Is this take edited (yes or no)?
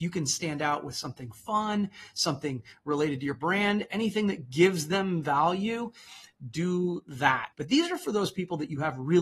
yes